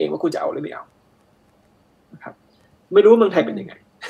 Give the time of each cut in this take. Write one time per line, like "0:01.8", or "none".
none